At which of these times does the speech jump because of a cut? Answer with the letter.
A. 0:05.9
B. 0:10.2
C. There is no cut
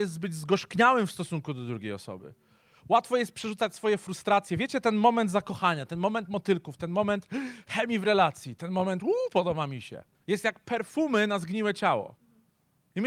B